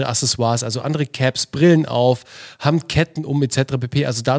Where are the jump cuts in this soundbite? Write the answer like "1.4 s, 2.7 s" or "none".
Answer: none